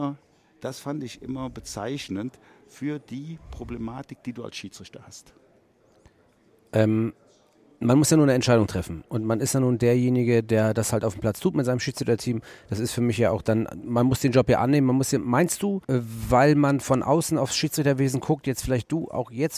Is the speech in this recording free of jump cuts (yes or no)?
no